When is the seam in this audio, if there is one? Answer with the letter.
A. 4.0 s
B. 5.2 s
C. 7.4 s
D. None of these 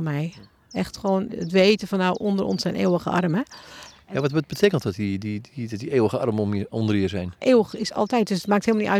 C